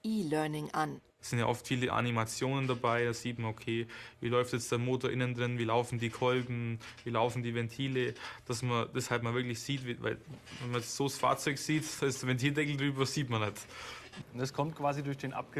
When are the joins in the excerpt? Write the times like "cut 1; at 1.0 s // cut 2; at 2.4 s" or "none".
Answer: cut 1; at 1.1 s // cut 2; at 14.2 s